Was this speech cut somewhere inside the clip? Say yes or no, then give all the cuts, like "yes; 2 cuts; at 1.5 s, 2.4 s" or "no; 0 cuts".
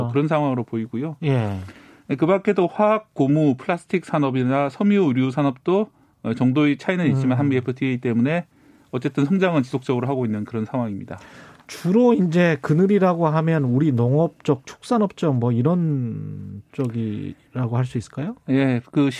no; 0 cuts